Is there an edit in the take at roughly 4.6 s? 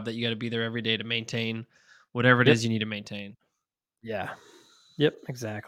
no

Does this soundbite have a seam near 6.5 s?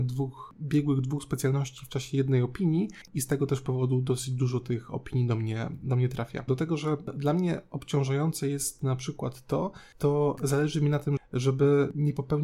yes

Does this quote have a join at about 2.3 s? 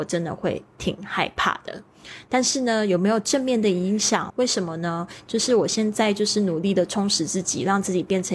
no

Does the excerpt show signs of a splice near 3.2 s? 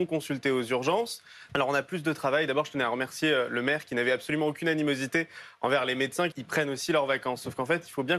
no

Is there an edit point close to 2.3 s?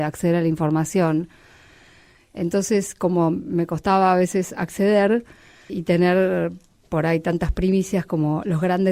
no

